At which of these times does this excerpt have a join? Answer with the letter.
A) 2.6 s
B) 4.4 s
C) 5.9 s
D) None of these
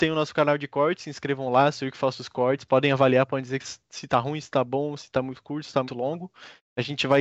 C